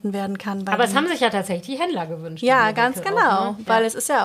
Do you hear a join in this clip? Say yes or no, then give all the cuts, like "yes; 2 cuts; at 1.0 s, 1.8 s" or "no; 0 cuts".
no; 0 cuts